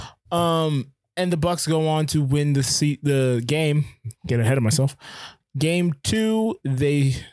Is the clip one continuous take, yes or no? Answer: no